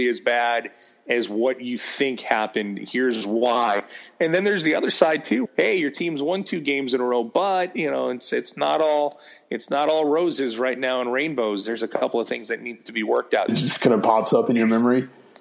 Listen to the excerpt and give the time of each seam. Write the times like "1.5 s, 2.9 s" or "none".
5.4 s, 13.5 s